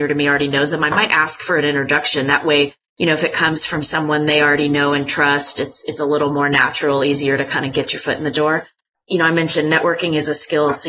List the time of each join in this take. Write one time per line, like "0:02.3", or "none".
none